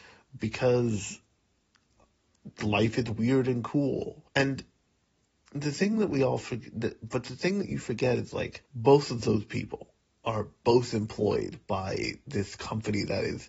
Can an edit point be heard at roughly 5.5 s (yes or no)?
no